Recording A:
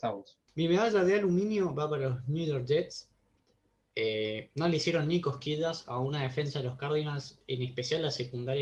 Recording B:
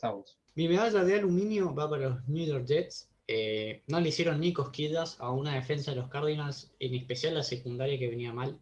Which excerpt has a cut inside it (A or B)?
B